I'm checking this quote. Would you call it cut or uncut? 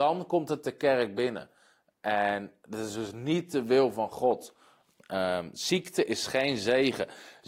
uncut